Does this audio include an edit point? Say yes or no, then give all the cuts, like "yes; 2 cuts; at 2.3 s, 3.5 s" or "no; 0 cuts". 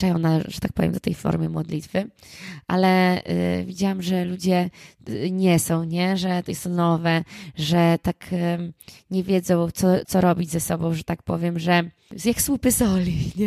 yes; 1 cut; at 10.0 s